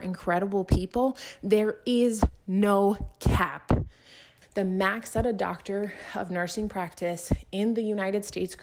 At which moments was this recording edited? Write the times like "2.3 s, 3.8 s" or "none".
4.4 s